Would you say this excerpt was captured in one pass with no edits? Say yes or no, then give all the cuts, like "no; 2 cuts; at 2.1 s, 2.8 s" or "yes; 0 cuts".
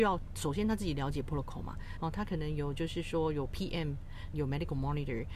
no; 2 cuts; at 2.0 s, 4.3 s